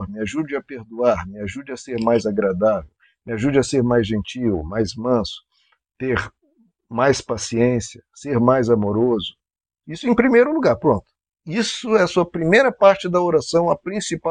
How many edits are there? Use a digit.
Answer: 1